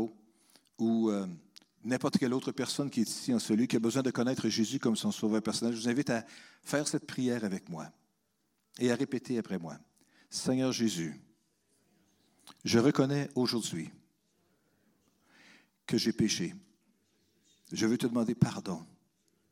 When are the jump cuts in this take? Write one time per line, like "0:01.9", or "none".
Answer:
none